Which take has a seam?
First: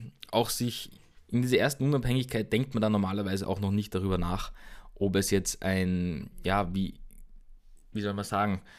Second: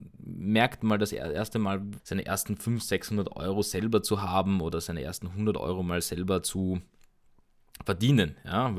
second; 1 cut; at 2.0 s

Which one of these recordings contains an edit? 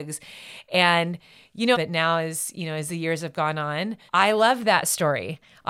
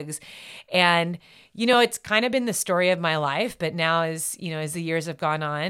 first; 2 cuts; at 1.7 s, 4.1 s

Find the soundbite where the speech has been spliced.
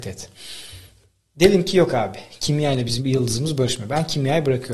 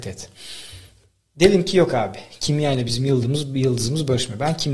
first; 1 cut; at 3.0 s

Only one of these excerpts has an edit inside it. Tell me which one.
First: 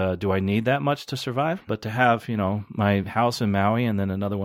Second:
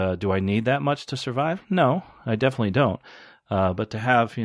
first; 1 cut; at 1.7 s

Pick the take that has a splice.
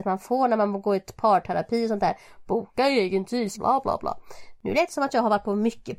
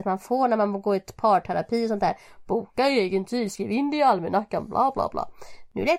first; 1 cut; at 3.5 s

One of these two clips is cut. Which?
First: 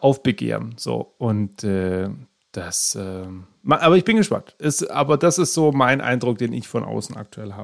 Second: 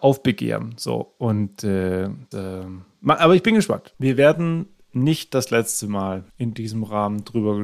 second; 3 cuts; at 2.3 s, 3.9 s, 6.3 s

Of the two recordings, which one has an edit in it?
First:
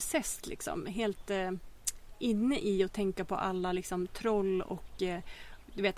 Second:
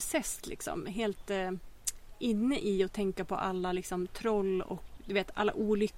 second; 1 cut; at 5.0 s

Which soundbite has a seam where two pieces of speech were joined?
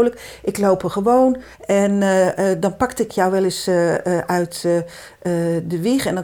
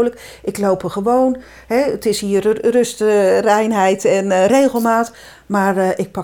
first; 1 cut; at 1.5 s

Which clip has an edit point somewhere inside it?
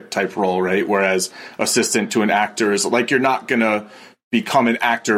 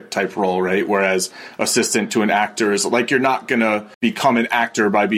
second; 1 cut; at 3.9 s

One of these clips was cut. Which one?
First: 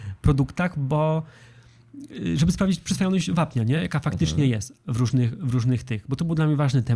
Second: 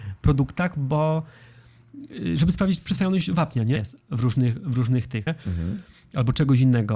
second; 2 cuts; at 3.8 s, 5.3 s

